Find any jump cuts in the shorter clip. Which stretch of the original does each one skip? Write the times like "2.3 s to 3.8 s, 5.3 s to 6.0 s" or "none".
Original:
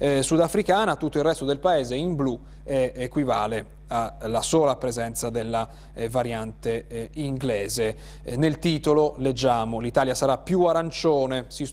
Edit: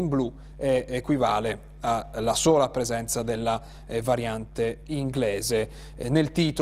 6.9 s to 7.1 s